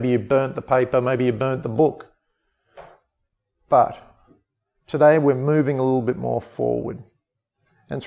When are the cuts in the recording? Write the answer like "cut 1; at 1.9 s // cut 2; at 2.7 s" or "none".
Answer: none